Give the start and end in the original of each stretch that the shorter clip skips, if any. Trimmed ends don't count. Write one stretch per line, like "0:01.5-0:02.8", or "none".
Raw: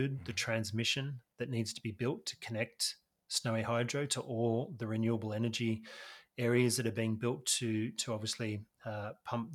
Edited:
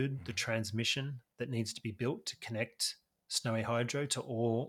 none